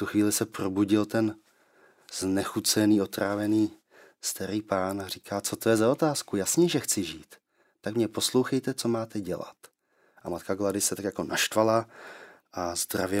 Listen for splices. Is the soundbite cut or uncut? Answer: cut